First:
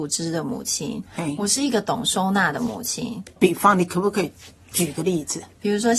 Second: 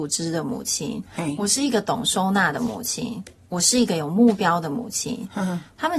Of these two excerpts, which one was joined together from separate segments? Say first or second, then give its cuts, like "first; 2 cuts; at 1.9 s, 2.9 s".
first; 1 cut; at 3.4 s